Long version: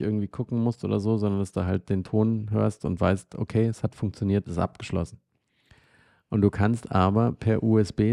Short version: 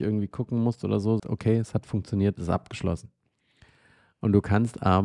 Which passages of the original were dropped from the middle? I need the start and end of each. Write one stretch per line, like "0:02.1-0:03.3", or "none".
0:01.2-0:03.3

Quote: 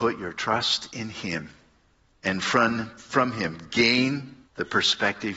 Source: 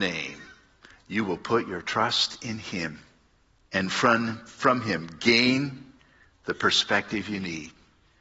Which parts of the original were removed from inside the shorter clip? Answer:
0:05.9-0:06.3

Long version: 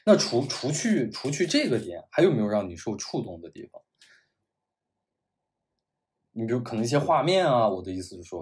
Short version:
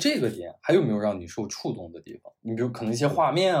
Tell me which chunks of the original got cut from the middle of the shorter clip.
0:03.9-0:06.3

